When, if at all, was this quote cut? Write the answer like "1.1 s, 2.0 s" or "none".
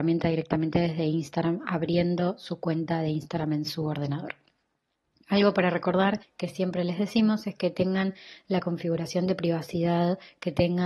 none